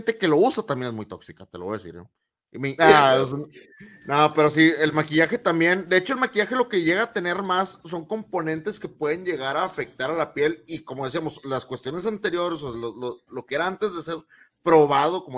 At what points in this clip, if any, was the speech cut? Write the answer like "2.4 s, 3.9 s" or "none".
2.8 s